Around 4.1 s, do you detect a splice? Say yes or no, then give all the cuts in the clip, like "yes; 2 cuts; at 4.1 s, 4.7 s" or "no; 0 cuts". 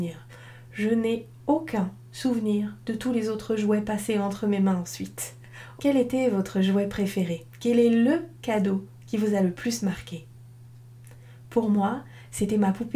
no; 1 cut; at 5.8 s